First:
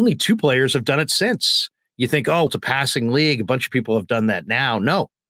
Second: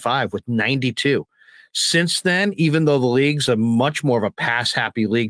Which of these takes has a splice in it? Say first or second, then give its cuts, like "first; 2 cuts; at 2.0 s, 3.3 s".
first; 1 cut; at 2.5 s